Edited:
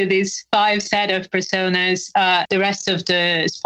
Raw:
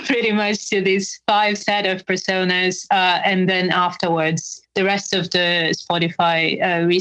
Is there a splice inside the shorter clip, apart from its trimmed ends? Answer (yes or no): yes